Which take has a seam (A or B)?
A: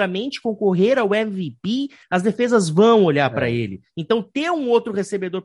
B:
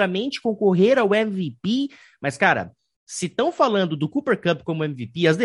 A